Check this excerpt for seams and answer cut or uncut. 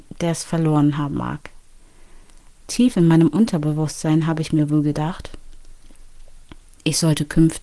cut